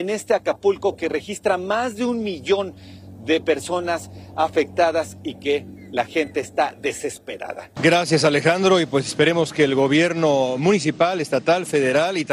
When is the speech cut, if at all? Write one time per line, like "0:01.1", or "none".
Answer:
0:07.8